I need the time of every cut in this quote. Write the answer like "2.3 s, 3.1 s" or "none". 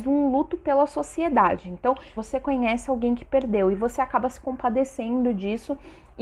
2.2 s

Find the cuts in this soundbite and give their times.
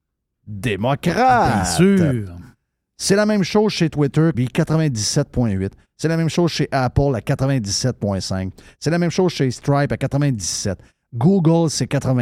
4.3 s

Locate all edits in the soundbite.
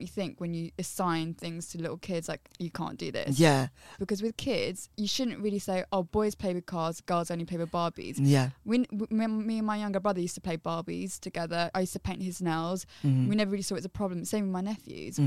4.0 s

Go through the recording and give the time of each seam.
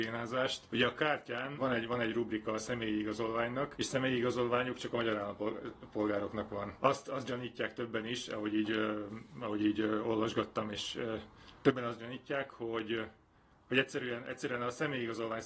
none

